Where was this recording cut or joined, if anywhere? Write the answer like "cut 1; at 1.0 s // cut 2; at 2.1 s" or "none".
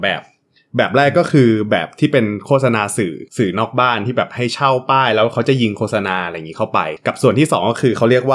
cut 1; at 3.3 s